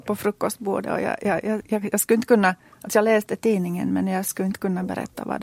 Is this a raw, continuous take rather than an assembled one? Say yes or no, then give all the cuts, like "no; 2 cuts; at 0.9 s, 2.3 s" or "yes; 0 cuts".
yes; 0 cuts